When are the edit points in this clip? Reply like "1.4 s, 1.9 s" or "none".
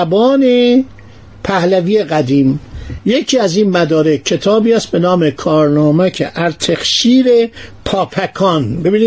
none